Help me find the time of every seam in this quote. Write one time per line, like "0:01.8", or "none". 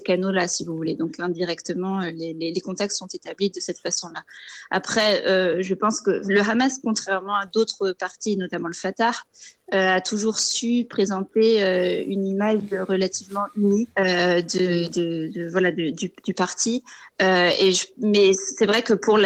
0:13.9